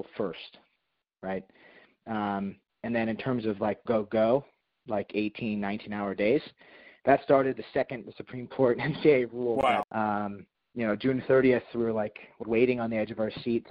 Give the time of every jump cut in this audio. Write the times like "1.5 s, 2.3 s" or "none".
3.9 s, 9.8 s, 12.4 s

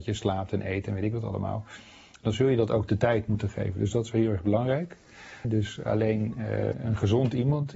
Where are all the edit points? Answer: 5.4 s, 6.7 s

